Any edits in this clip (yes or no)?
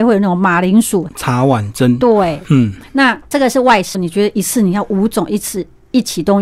yes